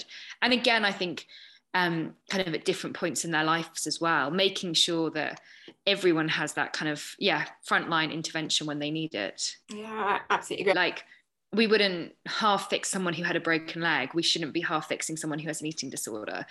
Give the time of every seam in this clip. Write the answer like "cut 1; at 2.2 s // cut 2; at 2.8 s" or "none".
cut 1; at 9.6 s // cut 2; at 10.7 s